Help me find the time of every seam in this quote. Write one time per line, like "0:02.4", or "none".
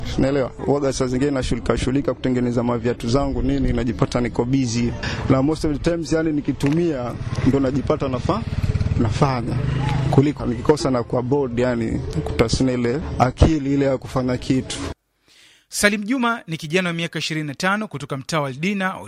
0:10.4